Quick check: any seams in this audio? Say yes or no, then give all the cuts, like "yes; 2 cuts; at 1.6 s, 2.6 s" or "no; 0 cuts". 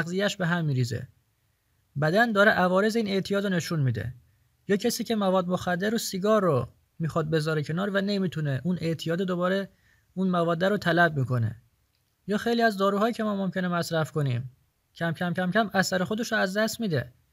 no; 0 cuts